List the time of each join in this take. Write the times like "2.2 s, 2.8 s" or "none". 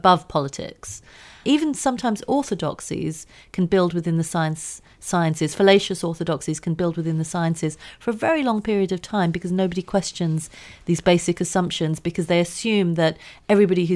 1.4 s